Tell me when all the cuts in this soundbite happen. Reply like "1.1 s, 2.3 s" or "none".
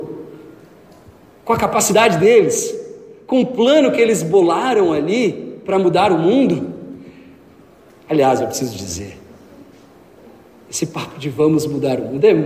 none